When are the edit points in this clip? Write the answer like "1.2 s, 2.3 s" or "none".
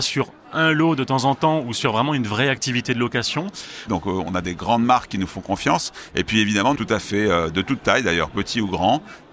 3.9 s, 6.8 s